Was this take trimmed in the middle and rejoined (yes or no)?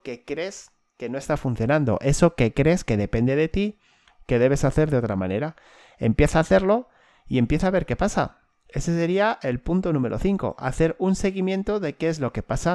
no